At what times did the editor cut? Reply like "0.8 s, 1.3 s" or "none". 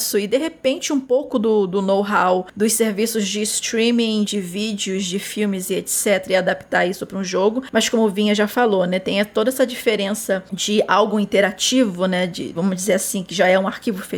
4.3 s, 12.5 s

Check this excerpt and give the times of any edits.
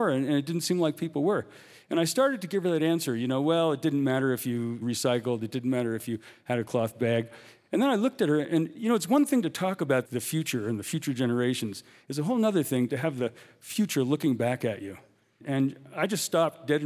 none

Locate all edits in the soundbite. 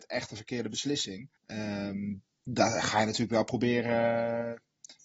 1.4 s

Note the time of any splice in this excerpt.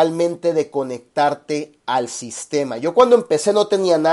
none

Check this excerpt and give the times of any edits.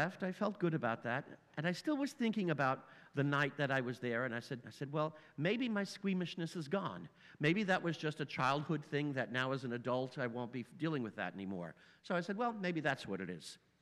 4.6 s

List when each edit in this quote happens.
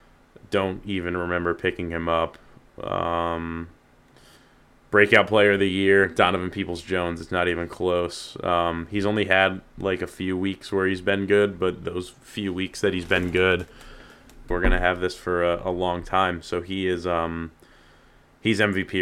14.5 s

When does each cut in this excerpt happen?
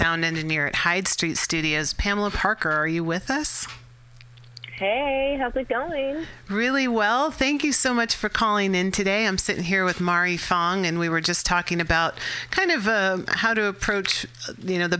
none

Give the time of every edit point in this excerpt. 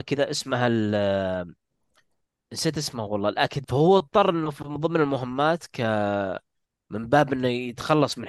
3.6 s

